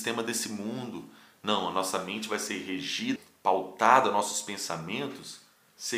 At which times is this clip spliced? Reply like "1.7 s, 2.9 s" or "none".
3.2 s